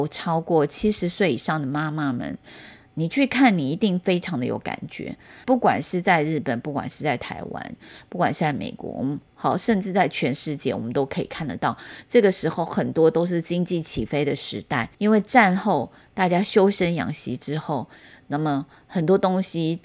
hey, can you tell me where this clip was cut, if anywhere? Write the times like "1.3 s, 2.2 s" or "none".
5.4 s, 14.9 s